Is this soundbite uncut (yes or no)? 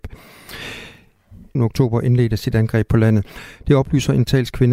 no